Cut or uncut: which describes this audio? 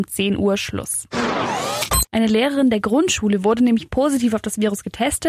cut